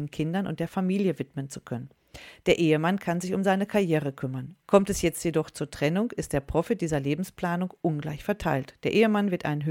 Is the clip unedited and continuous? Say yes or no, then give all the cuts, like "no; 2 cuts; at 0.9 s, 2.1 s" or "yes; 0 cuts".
no; 1 cut; at 4.6 s